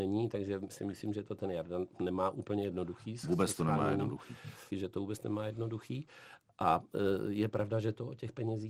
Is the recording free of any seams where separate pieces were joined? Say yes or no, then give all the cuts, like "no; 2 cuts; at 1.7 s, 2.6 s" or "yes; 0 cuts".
no; 1 cut; at 4.7 s